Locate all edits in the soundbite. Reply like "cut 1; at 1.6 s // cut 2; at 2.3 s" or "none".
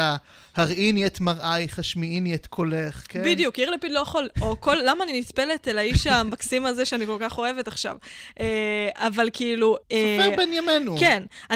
cut 1; at 9.8 s

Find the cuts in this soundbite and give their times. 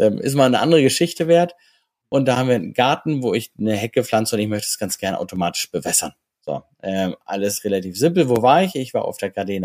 none

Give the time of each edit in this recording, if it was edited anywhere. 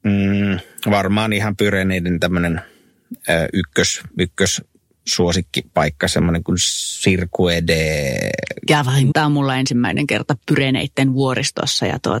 cut 1; at 9.1 s

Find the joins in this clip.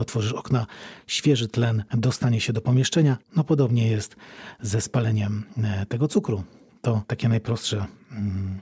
cut 1; at 3.2 s

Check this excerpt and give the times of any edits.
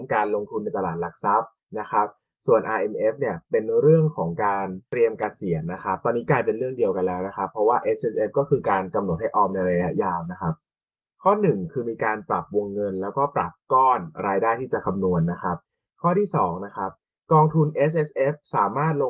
none

